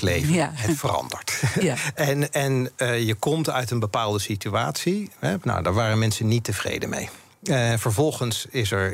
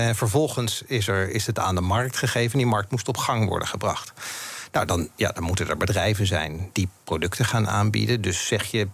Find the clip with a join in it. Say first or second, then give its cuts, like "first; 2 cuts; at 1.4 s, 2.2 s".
first; 1 cut; at 5.4 s